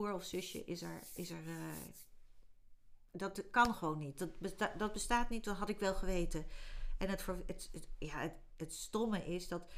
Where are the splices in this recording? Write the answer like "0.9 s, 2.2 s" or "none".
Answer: 1.2 s